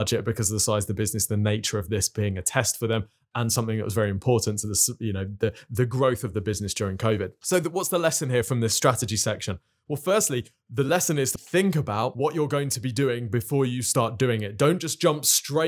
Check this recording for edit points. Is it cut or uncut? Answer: cut